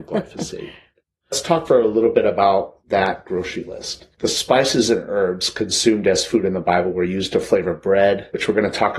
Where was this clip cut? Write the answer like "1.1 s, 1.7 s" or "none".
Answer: 1.7 s